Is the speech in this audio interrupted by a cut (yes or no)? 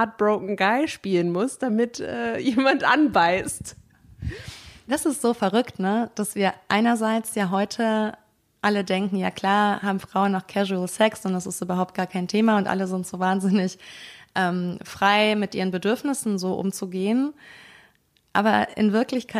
no